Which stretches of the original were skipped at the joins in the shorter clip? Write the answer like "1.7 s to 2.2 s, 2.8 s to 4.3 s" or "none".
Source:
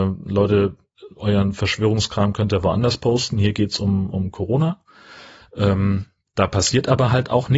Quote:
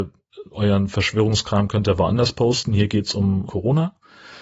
4.1 s to 4.3 s

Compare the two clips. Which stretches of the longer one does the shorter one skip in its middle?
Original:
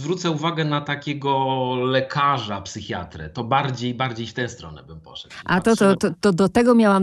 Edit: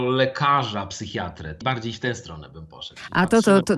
3.4 s to 4.0 s

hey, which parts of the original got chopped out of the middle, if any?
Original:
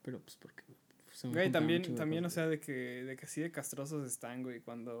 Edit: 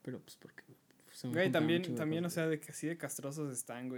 2.7 s to 3.2 s

